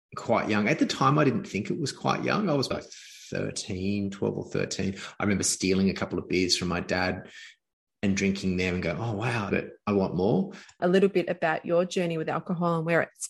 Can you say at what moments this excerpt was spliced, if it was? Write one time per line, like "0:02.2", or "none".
0:02.7
0:09.5
0:10.8